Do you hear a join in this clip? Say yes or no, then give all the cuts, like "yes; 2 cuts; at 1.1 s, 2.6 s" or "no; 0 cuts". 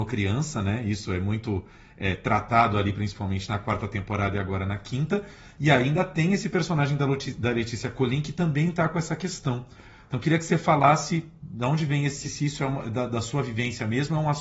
yes; 1 cut; at 12.2 s